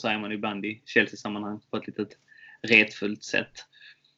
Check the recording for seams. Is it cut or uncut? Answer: uncut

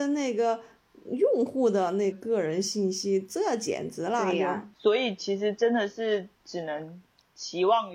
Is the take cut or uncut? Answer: cut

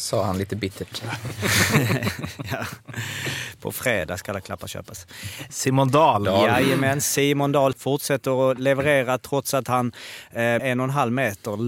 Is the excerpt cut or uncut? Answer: cut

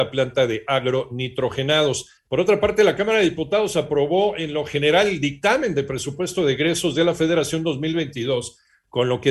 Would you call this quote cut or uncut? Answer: uncut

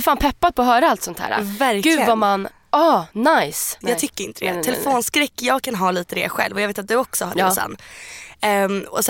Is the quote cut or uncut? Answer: cut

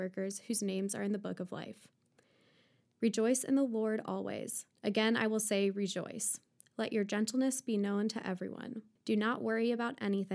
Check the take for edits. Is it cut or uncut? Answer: cut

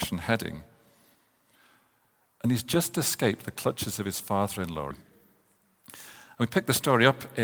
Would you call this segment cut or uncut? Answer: cut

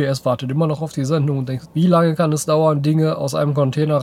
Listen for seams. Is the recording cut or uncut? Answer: cut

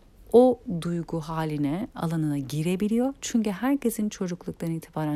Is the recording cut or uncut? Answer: cut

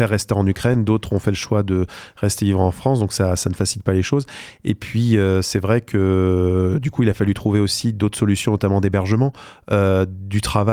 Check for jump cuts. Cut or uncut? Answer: uncut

